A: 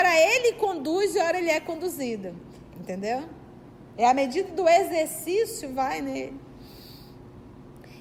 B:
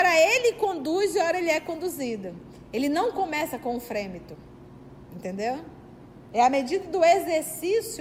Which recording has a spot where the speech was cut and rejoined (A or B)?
A